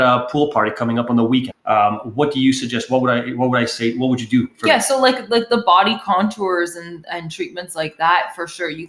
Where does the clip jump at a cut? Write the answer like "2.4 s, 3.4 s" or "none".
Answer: 1.5 s

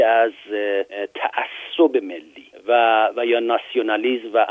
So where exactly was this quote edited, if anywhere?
none

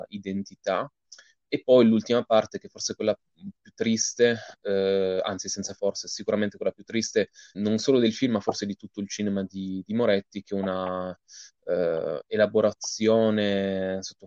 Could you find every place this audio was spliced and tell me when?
7.5 s

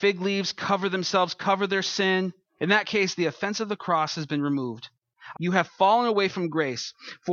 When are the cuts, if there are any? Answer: 2.6 s, 5.3 s

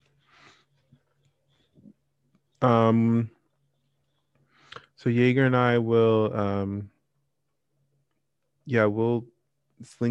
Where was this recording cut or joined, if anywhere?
none

